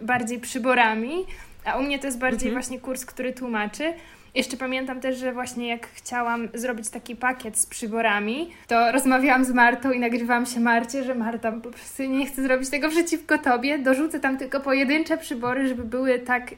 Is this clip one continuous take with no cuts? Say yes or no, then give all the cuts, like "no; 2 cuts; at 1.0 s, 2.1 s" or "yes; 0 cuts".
no; 2 cuts; at 8.6 s, 11.5 s